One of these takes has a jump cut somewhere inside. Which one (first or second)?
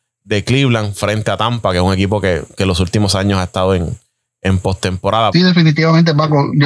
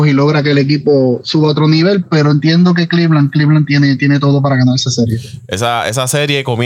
first